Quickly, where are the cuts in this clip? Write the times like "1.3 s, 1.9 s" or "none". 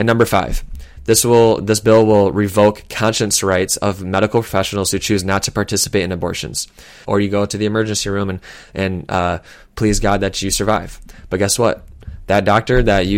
7.0 s